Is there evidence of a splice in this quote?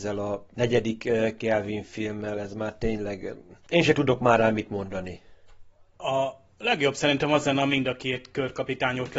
no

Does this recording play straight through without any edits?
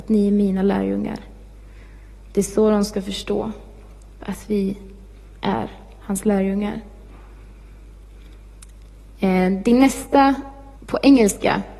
no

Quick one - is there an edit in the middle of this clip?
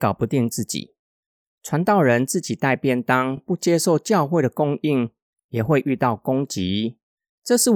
no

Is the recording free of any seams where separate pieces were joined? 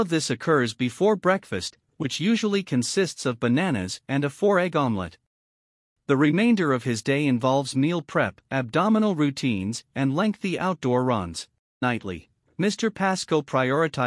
no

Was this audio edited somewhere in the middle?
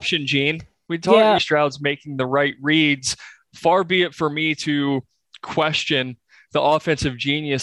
yes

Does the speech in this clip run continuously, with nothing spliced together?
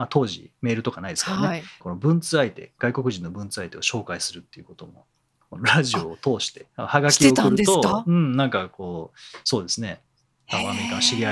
no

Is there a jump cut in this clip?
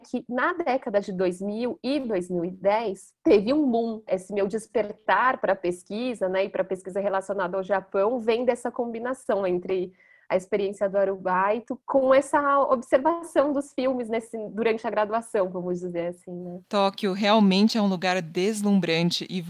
yes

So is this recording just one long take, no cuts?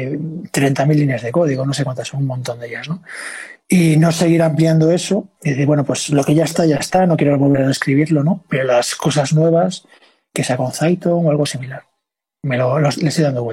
yes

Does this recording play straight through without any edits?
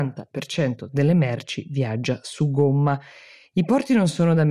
yes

